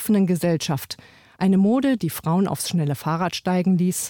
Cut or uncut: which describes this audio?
cut